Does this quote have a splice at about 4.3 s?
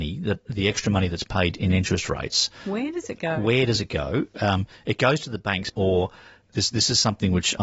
no; 1 cut; at 5.7 s

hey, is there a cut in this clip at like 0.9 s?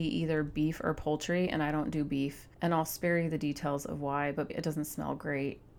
no; 2 cuts; at 2.5 s, 4.5 s

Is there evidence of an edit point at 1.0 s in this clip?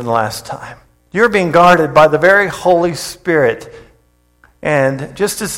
yes; 1 cut; at 1.0 s

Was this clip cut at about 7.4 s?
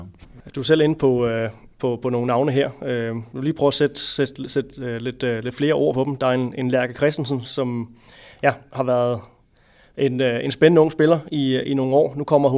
yes; 1 cut; at 7.4 s

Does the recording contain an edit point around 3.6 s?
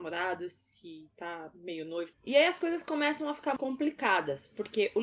yes; 2 cuts; at 2.1 s, 3.6 s

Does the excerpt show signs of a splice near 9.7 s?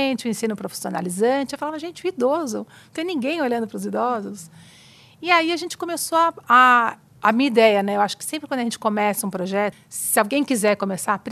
yes; 2 cuts; at 6.4 s, 9.7 s

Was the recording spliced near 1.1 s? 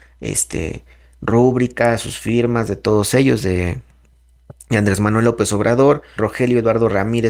no; 1 cut; at 6.2 s

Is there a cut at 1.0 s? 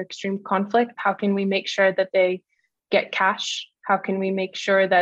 yes; 1 cut; at 1.0 s

